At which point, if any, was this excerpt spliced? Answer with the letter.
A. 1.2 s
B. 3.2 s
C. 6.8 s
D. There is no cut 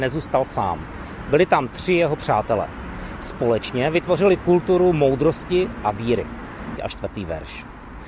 C